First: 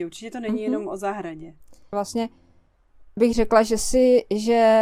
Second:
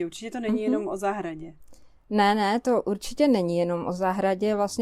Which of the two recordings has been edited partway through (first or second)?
first